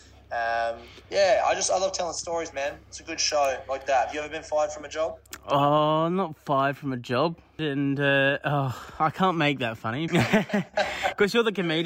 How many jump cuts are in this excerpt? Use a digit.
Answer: 2